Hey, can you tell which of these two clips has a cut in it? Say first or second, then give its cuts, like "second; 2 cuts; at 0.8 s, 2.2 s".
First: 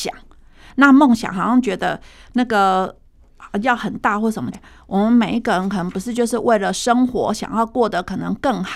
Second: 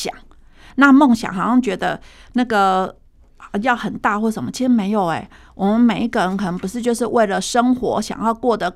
first; 1 cut; at 4.5 s